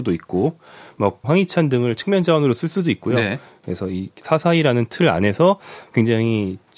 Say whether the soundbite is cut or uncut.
cut